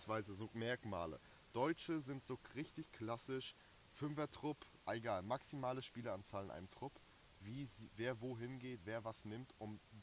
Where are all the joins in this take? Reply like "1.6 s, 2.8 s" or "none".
7.4 s